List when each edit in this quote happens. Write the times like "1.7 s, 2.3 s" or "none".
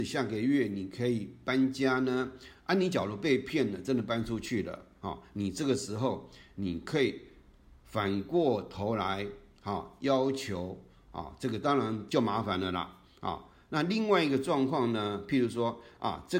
2.5 s, 12.1 s